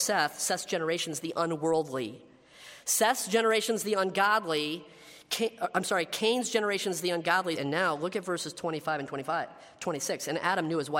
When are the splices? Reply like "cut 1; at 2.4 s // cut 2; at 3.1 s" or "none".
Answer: cut 1; at 7.6 s

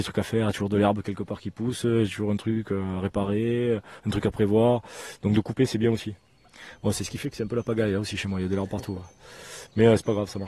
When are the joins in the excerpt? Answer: none

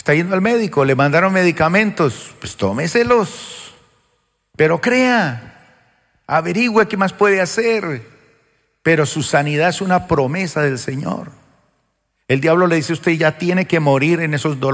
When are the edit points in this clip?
none

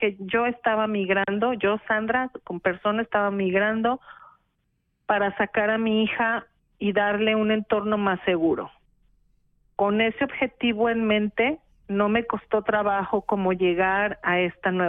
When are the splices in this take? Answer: none

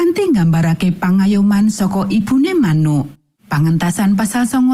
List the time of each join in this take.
cut 1; at 3.3 s

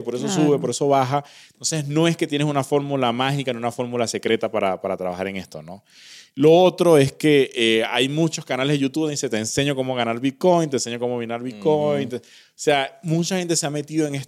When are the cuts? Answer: none

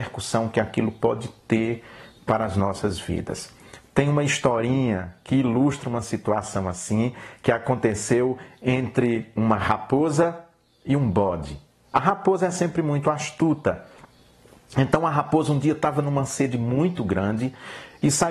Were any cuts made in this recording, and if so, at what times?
none

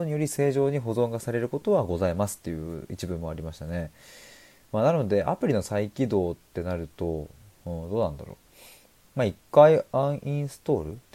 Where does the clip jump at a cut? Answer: none

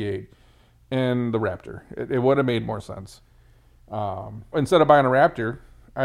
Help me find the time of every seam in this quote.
cut 1; at 4.5 s

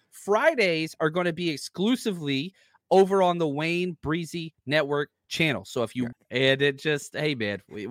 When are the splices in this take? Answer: cut 1; at 6.1 s

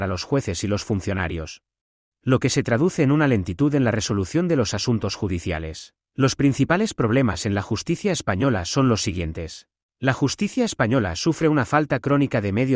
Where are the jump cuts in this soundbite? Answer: cut 1; at 6.1 s // cut 2; at 9.8 s

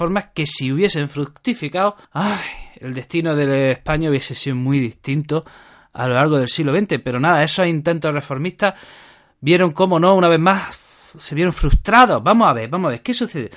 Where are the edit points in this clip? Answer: cut 1; at 2.0 s

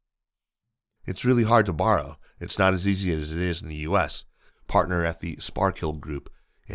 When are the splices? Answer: cut 1; at 1.0 s // cut 2; at 4.5 s

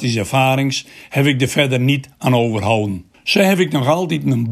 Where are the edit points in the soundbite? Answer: cut 1; at 3.1 s

